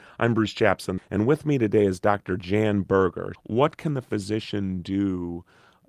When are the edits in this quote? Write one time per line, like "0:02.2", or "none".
0:01.0
0:03.3